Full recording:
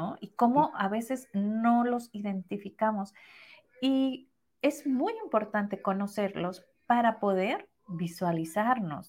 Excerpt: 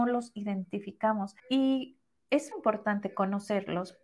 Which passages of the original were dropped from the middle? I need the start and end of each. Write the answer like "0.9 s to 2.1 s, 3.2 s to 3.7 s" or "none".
3.2 s to 3.7 s, 4.8 s to 5.2 s